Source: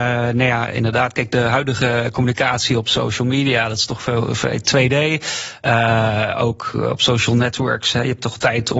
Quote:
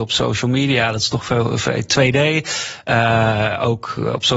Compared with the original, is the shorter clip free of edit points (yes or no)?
yes